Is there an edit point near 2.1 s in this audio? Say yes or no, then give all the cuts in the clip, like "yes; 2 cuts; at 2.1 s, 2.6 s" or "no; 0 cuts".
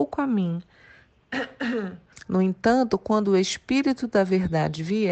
yes; 1 cut; at 2.1 s